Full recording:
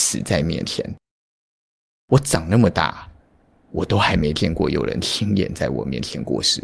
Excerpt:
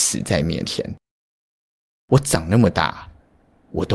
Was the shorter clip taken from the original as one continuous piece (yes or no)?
yes